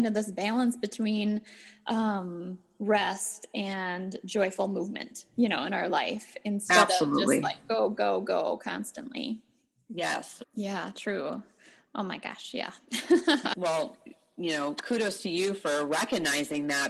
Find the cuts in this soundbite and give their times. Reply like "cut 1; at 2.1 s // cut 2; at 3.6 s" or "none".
cut 1; at 10.4 s // cut 2; at 13.5 s